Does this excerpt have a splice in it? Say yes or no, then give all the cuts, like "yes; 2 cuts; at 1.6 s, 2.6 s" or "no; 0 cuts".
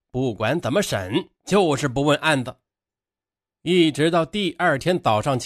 no; 0 cuts